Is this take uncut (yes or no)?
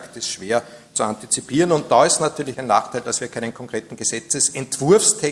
no